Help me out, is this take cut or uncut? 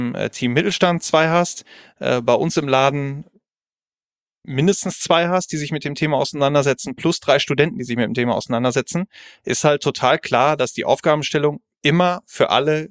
uncut